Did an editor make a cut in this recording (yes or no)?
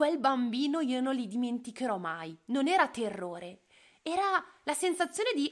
no